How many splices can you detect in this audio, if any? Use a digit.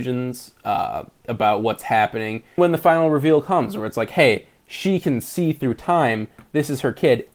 1